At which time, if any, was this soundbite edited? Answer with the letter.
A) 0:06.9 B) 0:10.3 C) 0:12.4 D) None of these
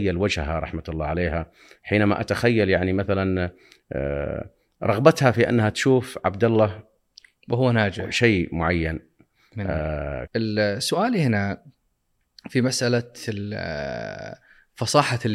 B